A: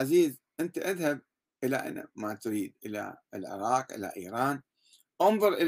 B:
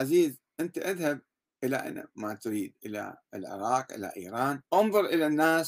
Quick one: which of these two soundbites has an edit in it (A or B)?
B